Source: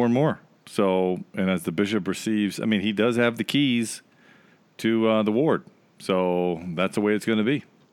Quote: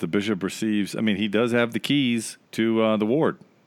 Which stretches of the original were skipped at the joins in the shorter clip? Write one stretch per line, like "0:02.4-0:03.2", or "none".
0:04.1-0:04.7